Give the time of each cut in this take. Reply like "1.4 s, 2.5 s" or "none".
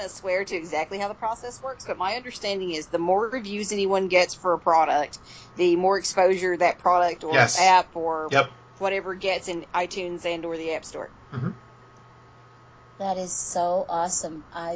none